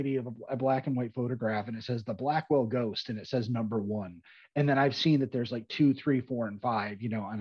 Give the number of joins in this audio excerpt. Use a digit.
0